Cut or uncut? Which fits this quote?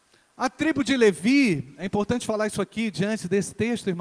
uncut